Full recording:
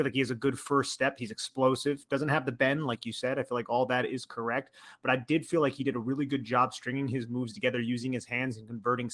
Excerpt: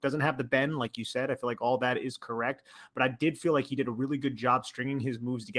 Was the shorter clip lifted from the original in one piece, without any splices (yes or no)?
yes